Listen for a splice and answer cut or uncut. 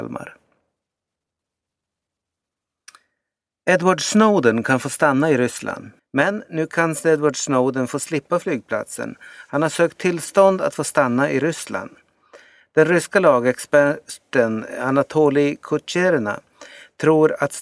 cut